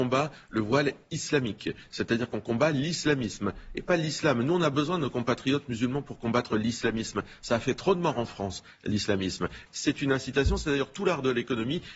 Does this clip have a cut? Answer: yes; 1 cut; at 9.7 s

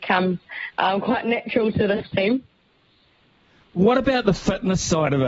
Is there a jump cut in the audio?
no; 0 cuts

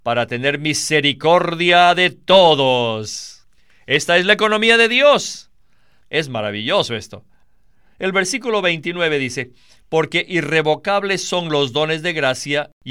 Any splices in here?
yes; 1 cut; at 6.0 s

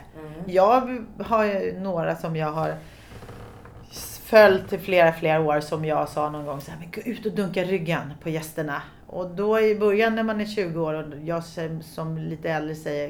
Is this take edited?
no; 0 cuts

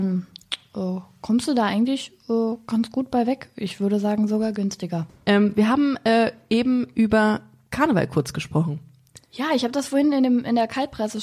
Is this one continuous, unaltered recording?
yes; 0 cuts

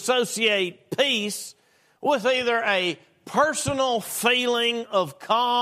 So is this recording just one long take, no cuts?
yes; 0 cuts

